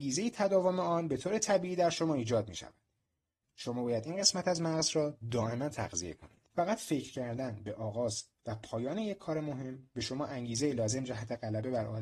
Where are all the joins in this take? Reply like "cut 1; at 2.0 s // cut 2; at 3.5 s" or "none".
cut 1; at 3.4 s // cut 2; at 6.4 s

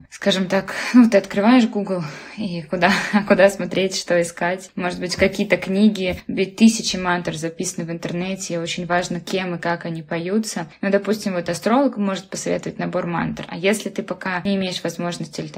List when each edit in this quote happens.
none

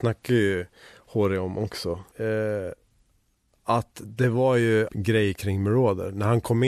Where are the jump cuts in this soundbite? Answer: cut 1; at 2.1 s // cut 2; at 4.9 s

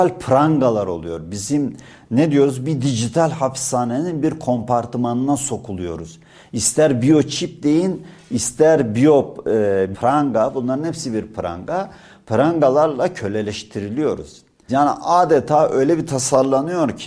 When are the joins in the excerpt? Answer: cut 1; at 9.9 s // cut 2; at 14.7 s

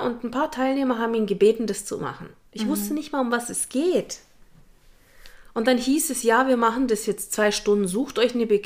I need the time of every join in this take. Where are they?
none

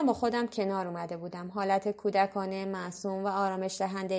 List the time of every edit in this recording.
none

